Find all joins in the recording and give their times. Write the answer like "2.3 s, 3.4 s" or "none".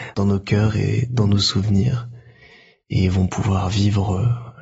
none